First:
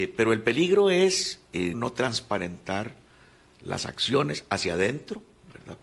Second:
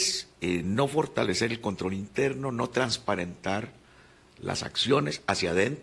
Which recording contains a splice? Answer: first; 1 cut; at 1.7 s

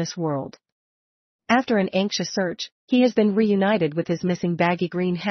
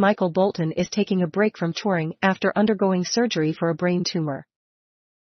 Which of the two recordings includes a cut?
first; 1 cut; at 1.4 s

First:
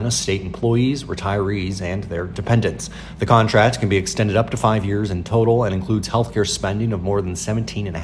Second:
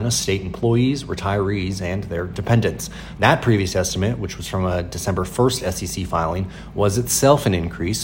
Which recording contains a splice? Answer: second; 1 cut; at 3.2 s

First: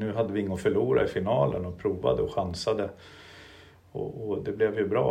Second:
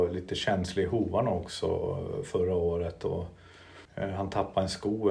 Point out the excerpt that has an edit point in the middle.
second; 1 cut; at 3.9 s

